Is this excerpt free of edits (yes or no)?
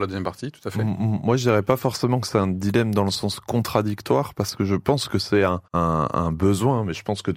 no